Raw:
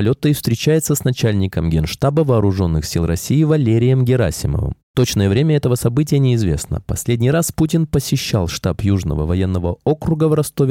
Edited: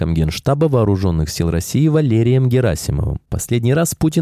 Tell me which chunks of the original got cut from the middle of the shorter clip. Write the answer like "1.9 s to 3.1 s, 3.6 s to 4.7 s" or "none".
4.8 s to 6.8 s